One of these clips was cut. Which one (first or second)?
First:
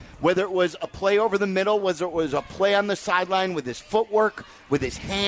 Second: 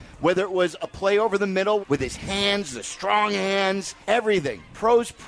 second